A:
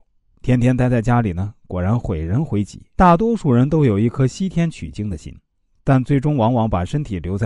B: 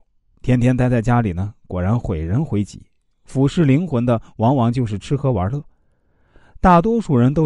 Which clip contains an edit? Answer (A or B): A